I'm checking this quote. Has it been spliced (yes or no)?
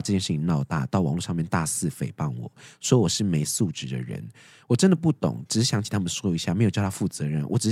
no